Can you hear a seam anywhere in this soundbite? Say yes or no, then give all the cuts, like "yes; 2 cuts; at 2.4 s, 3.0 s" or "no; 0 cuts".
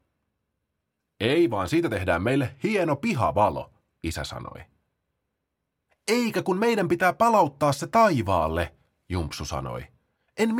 no; 0 cuts